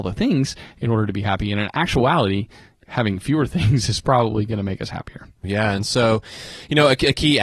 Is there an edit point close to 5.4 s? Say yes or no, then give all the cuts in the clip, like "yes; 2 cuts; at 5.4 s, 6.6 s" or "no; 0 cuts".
yes; 2 cuts; at 2.8 s, 5.4 s